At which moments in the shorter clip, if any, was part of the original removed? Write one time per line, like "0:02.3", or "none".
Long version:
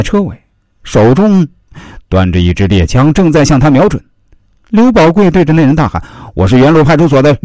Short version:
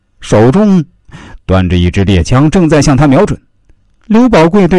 none